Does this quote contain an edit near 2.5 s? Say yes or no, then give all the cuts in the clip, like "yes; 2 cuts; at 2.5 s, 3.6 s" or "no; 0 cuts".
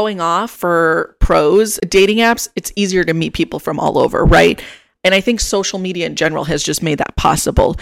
no; 0 cuts